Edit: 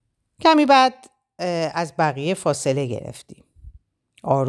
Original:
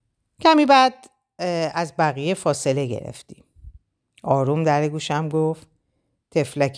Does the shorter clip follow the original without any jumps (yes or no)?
yes